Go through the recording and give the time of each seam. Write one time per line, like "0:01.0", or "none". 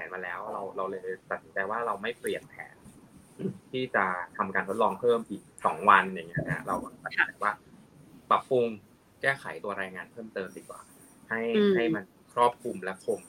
none